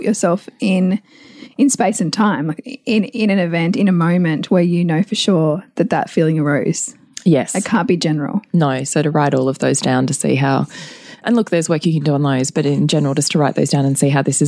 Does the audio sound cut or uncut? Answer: uncut